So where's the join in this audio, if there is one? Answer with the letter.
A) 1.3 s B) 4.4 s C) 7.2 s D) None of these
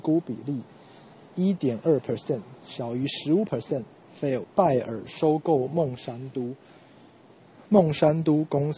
B